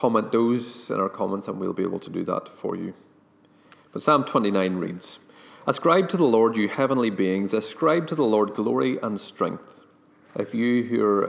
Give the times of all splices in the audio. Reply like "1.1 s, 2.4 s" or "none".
10.2 s